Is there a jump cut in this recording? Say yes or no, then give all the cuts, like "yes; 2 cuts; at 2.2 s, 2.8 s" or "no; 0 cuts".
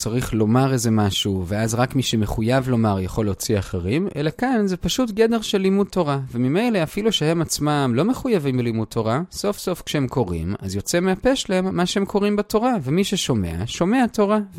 no; 0 cuts